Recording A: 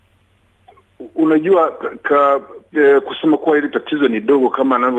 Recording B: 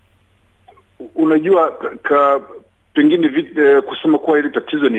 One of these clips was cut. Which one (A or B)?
A